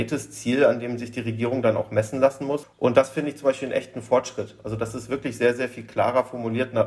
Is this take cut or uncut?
cut